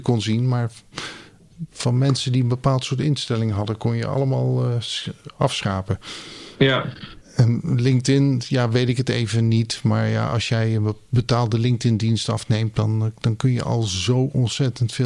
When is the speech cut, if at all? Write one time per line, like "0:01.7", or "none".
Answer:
none